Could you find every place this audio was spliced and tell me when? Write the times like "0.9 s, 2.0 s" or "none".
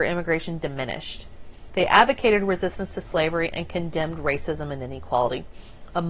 1.7 s